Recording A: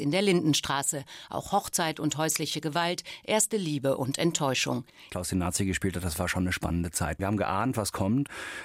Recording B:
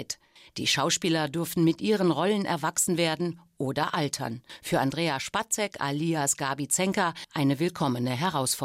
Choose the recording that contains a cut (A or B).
A